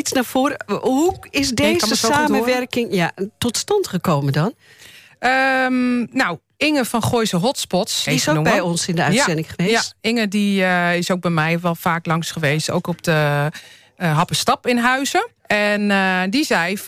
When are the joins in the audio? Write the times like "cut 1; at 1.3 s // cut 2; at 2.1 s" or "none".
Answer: cut 1; at 8.1 s // cut 2; at 15.4 s